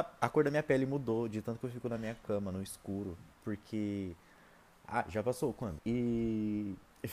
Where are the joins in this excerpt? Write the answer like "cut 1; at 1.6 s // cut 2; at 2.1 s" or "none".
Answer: cut 1; at 3.3 s // cut 2; at 5.8 s

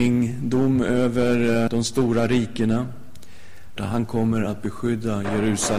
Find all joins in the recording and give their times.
cut 1; at 1.7 s // cut 2; at 3.8 s

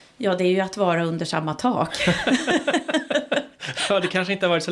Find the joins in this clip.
none

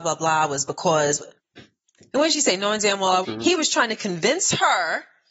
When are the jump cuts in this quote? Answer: cut 1; at 1.4 s // cut 2; at 3.2 s

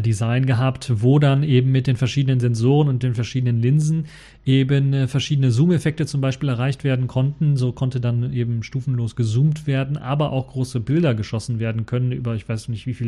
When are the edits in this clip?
none

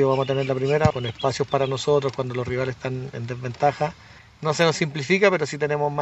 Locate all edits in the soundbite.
cut 1; at 0.9 s

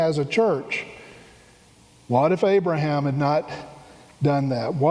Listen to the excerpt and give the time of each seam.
none

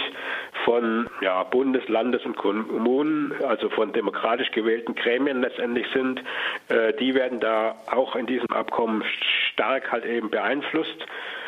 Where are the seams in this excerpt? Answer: none

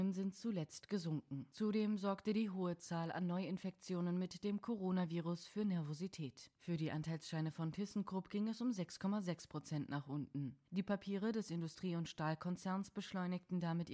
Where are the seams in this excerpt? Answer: cut 1; at 6.6 s

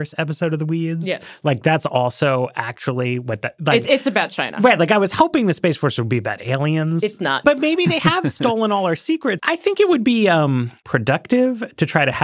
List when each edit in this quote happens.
cut 1; at 7.4 s // cut 2; at 9.4 s

